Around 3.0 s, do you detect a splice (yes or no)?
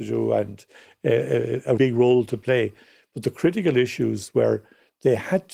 no